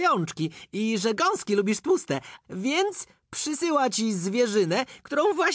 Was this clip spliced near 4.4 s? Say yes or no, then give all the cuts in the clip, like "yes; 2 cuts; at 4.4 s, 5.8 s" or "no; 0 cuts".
no; 1 cut; at 2.4 s